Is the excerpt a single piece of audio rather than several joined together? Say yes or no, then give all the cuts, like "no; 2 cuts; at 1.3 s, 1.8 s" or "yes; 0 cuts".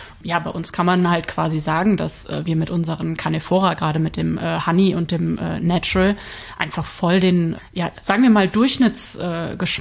yes; 0 cuts